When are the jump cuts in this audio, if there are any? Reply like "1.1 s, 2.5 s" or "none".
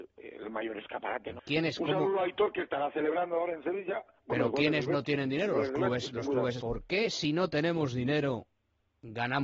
1.4 s, 6.6 s